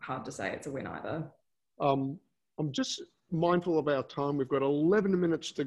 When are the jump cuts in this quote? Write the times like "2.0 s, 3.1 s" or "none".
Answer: 1.7 s